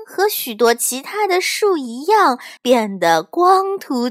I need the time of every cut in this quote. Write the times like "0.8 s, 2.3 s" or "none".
2.6 s